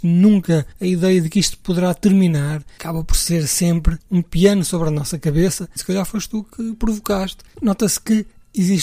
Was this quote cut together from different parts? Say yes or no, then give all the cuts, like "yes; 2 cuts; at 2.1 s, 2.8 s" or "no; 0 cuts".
yes; 2 cuts; at 5.8 s, 7.5 s